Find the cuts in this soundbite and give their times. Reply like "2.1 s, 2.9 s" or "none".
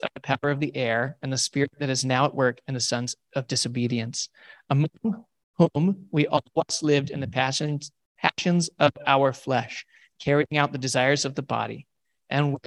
none